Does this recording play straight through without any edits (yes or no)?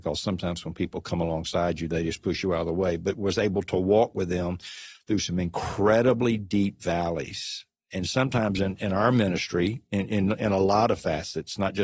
yes